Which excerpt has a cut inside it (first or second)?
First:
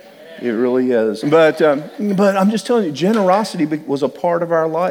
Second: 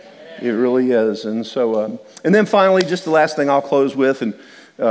first